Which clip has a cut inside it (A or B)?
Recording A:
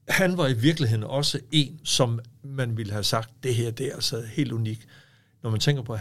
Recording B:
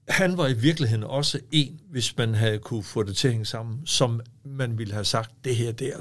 A